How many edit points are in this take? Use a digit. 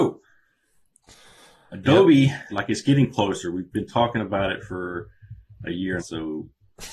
2